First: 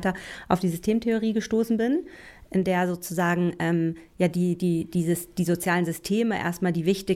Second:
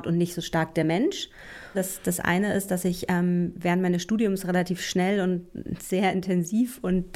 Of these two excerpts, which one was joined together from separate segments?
second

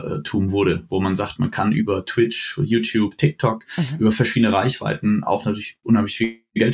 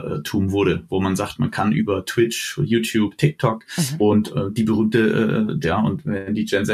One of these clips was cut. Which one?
second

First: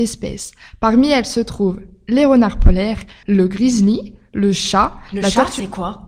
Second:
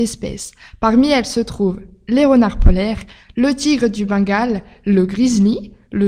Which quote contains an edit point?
first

